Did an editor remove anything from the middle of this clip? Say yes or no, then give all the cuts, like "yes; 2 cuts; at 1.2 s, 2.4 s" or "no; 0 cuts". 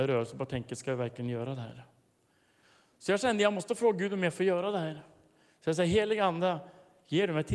no; 0 cuts